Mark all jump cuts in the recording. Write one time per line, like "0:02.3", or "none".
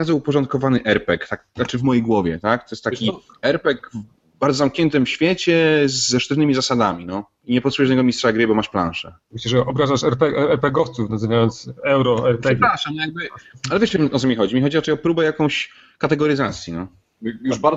none